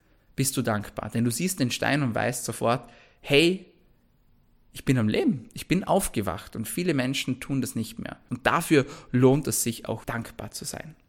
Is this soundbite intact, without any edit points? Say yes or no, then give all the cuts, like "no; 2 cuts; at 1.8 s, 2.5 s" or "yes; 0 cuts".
no; 2 cuts; at 8.3 s, 10.0 s